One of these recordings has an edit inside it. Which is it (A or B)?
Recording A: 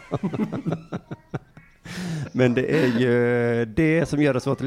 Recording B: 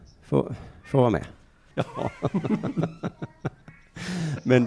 B